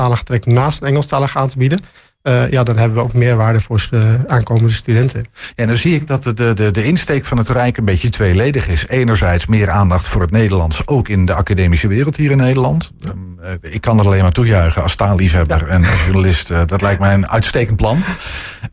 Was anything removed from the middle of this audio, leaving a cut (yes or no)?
no